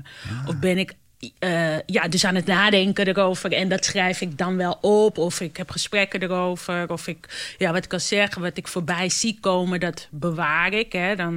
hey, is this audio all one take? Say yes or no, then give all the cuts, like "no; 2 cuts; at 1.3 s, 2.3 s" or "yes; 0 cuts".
yes; 0 cuts